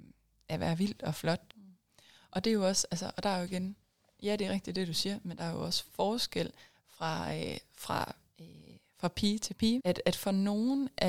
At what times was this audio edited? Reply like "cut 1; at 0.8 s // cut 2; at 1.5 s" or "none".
cut 1; at 1.5 s // cut 2; at 9.8 s

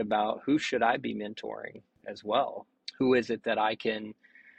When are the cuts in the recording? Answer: none

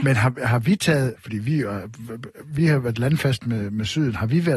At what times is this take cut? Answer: cut 1; at 1.2 s

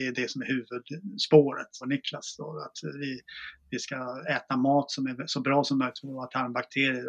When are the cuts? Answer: cut 1; at 1.8 s

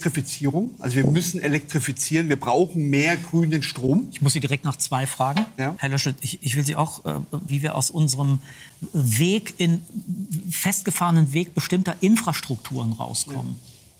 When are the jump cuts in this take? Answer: cut 1; at 5.8 s // cut 2; at 7.5 s

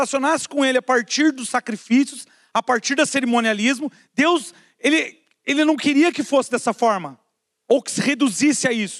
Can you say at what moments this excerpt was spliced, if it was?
none

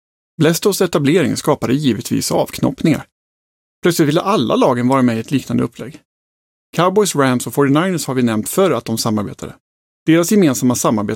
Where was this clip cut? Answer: cut 1; at 9.8 s

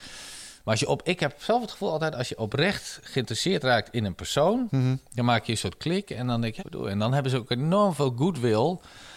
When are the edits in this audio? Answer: cut 1; at 6.6 s

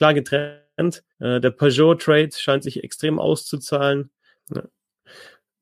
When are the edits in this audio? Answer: cut 1; at 1.1 s // cut 2; at 4.4 s

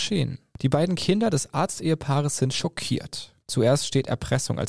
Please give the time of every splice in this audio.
cut 1; at 3.4 s

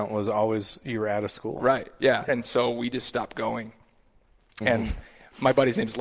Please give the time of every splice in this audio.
cut 1; at 2.3 s // cut 2; at 4.6 s

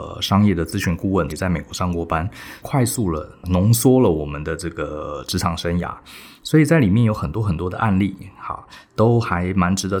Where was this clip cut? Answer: cut 1; at 1.3 s // cut 2; at 2.6 s

